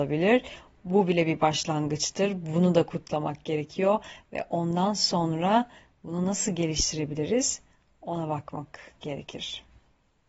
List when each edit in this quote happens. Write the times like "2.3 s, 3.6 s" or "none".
none